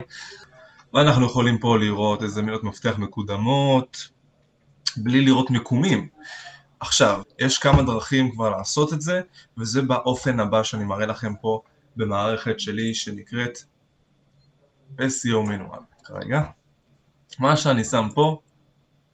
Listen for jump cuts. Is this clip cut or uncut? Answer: cut